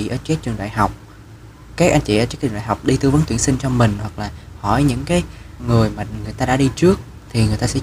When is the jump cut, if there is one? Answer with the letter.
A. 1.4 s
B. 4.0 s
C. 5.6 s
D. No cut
C